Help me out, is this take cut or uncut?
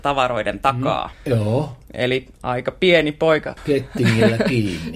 cut